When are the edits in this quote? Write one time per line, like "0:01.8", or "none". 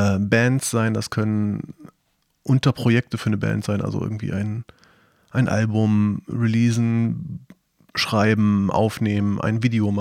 none

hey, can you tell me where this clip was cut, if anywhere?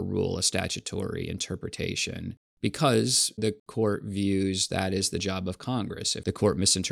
0:03.4

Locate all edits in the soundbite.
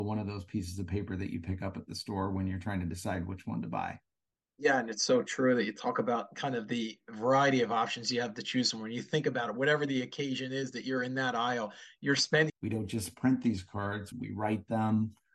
0:12.5
0:14.1

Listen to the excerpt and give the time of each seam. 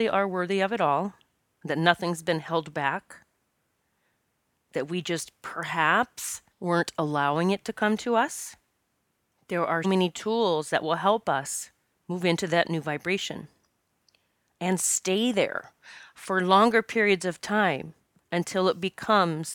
0:01.5
0:06.5
0:09.8

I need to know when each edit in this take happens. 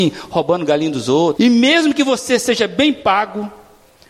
0:01.3

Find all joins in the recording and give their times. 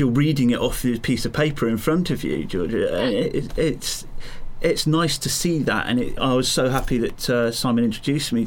0:06.2

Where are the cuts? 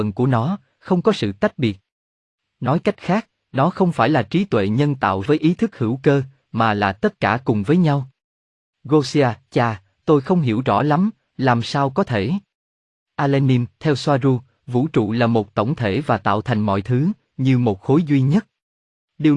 0:05.3

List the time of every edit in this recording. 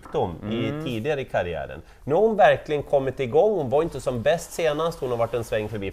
none

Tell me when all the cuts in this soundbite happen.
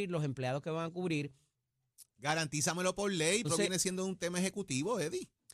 0:02.2
0:03.4

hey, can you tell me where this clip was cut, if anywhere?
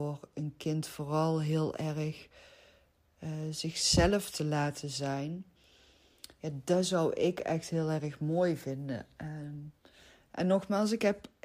none

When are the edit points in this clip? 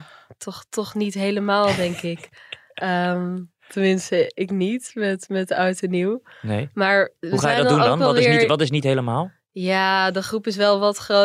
none

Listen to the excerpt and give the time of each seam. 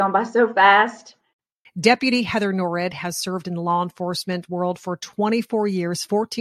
0:01.6

